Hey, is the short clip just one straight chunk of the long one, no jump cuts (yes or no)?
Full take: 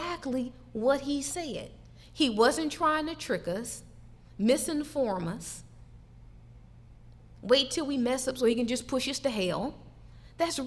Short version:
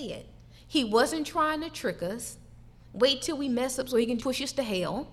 no